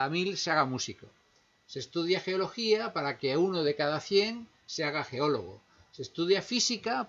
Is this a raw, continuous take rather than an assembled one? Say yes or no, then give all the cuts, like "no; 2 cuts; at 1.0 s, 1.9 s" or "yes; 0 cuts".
yes; 0 cuts